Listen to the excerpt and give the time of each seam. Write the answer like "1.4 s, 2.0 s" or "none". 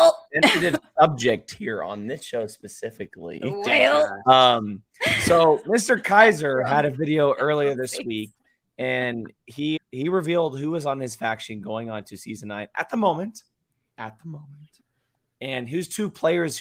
9.8 s